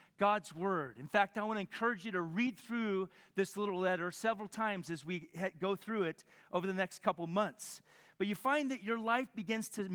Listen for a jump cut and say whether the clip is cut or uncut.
uncut